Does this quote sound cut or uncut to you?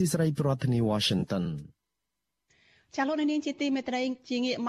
uncut